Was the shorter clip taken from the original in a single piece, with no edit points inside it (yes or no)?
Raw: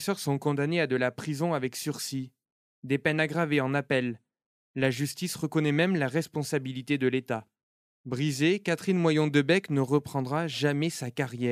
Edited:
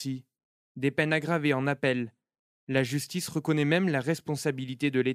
yes